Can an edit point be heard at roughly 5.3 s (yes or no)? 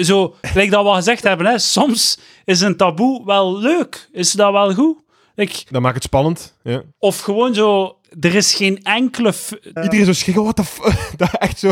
no